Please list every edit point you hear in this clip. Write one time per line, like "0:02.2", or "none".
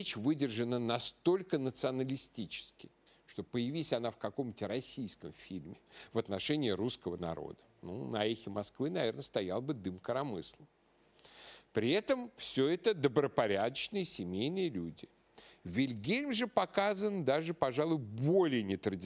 none